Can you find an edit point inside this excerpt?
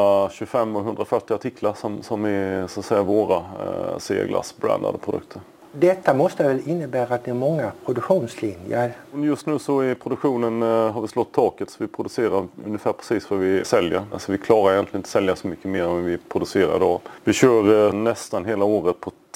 yes; 1 cut; at 17.9 s

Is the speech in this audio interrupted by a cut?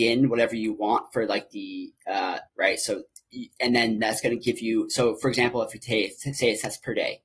yes; 1 cut; at 2.5 s

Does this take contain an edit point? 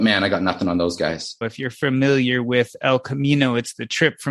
yes; 1 cut; at 1.4 s

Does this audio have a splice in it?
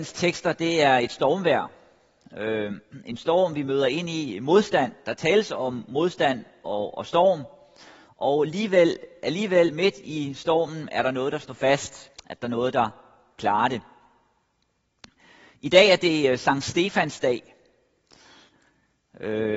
yes; 1 cut; at 12.2 s

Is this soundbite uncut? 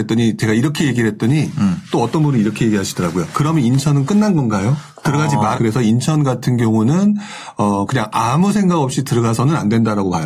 no; 1 cut; at 5.5 s

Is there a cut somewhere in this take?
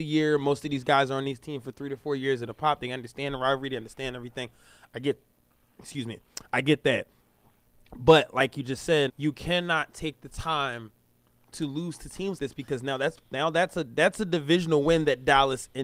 yes; 2 cuts; at 9.1 s, 12.4 s

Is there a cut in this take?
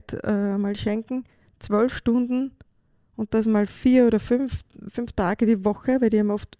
no; 0 cuts

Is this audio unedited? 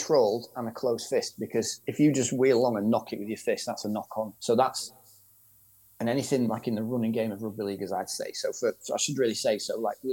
no; 1 cut; at 4.3 s

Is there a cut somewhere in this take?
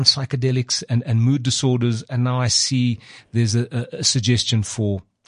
no; 0 cuts

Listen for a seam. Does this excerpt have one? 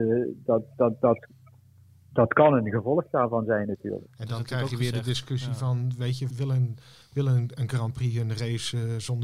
yes; 1 cut; at 6.3 s

